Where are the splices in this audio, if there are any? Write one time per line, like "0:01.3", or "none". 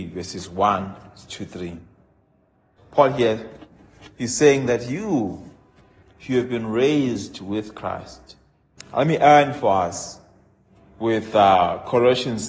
0:02.8
0:06.0
0:08.8